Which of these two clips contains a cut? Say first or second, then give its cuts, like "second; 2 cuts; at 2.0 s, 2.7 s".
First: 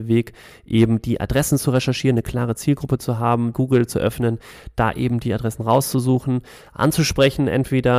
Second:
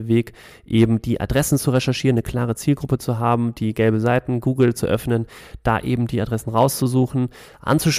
first; 1 cut; at 3.5 s